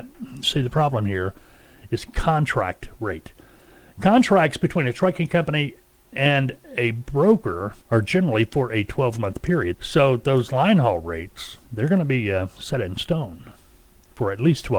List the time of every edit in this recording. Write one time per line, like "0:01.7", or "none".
0:07.8
0:09.7

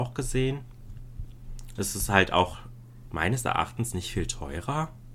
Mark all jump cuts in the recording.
0:01.8
0:03.1

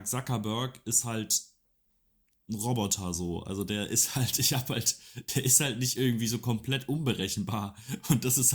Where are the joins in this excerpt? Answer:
none

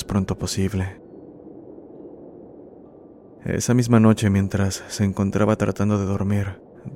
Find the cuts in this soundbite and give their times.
none

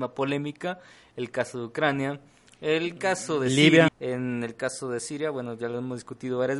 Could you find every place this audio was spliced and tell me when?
0:03.9

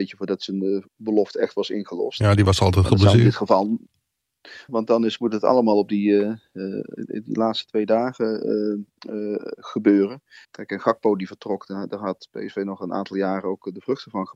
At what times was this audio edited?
0:04.7
0:10.4

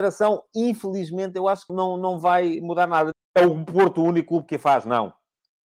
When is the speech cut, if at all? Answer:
0:01.7
0:03.1

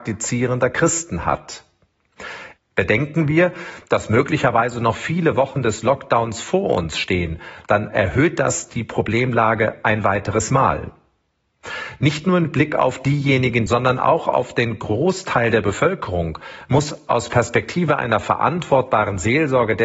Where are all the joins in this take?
0:02.6
0:13.7

